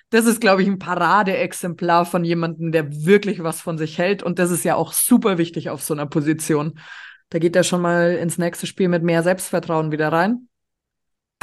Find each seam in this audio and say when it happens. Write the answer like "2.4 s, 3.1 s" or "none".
7.2 s